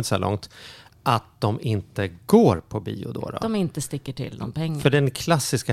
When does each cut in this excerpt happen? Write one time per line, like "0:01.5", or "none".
none